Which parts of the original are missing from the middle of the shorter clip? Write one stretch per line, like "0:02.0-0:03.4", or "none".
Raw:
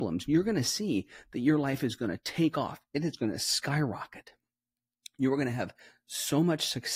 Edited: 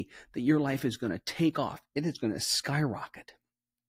none